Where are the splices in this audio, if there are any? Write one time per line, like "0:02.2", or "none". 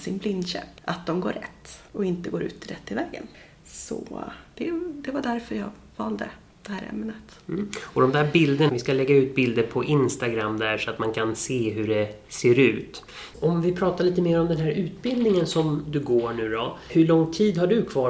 0:08.7
0:13.3